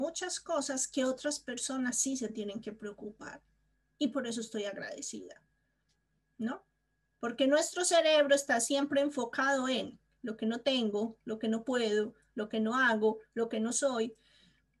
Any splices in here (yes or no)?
no